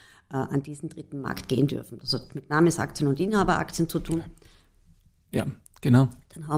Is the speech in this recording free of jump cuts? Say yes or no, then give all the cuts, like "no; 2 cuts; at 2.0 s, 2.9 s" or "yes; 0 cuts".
yes; 0 cuts